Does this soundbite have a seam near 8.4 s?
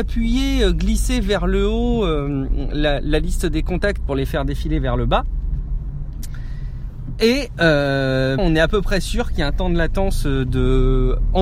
yes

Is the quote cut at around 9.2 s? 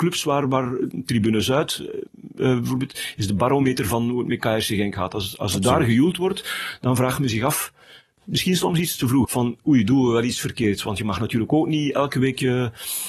yes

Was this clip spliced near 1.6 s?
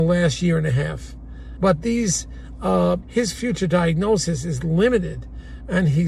yes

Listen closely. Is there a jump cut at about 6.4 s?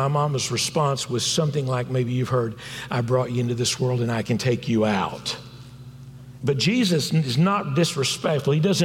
yes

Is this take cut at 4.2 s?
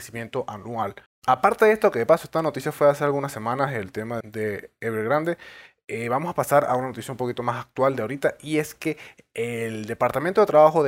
yes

